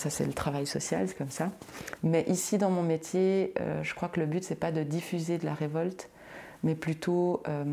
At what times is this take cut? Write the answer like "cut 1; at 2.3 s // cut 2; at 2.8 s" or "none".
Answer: cut 1; at 2.0 s